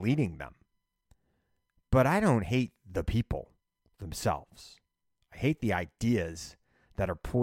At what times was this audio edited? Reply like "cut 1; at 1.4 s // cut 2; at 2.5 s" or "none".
none